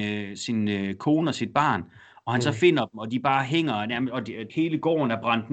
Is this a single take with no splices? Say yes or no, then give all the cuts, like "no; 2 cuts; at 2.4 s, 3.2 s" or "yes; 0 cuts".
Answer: no; 1 cut; at 4.5 s